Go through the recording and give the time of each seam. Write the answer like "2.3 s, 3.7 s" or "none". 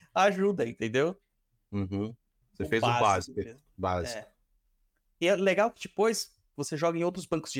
2.4 s, 6.6 s